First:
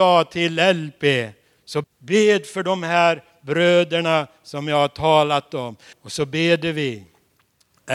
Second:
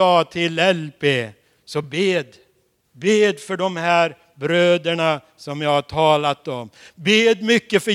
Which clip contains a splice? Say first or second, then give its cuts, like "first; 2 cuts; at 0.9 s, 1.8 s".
first; 2 cuts; at 1.8 s, 5.9 s